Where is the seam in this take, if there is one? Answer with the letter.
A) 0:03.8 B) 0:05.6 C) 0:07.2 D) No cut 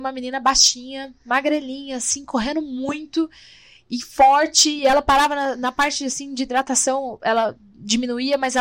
D